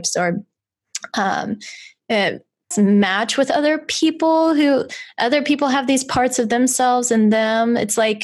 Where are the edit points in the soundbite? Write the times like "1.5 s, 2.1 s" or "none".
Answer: 2.7 s

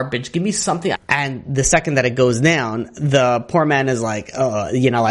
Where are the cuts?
0.9 s

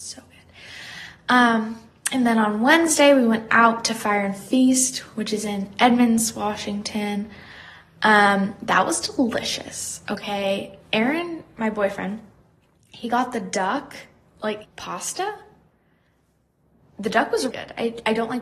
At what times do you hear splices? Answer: 14.6 s, 17.5 s

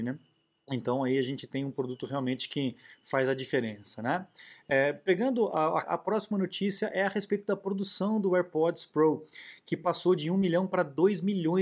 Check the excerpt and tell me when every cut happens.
5.8 s

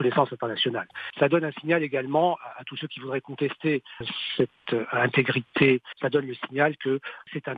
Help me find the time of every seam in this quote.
none

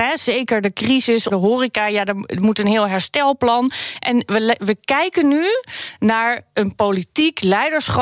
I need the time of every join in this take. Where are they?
1.3 s

